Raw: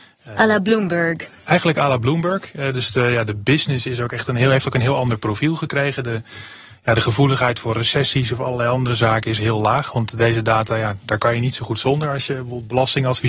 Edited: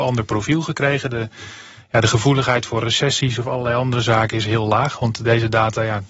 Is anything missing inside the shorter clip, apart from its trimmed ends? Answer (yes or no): no